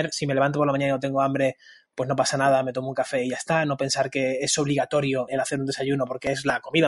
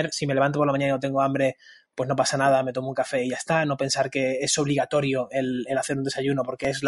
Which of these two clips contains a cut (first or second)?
first